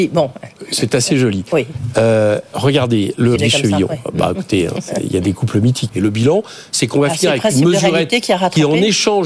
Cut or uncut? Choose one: cut